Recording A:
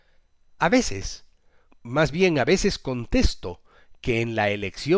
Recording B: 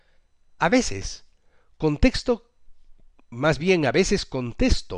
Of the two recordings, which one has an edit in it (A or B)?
A